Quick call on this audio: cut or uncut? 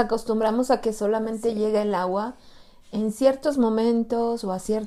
uncut